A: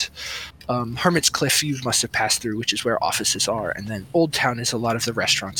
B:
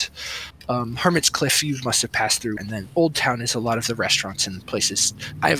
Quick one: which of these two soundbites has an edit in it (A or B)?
B